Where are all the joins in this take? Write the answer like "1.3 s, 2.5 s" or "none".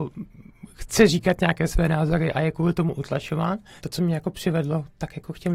3.8 s